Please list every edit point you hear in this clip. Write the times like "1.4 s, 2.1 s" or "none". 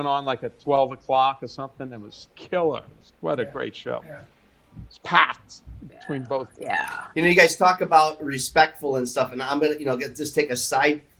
none